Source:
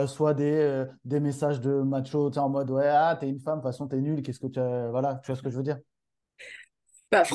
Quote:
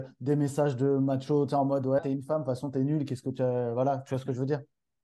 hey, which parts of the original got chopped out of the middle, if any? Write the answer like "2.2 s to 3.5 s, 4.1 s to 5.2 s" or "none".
2.8 s to 3.2 s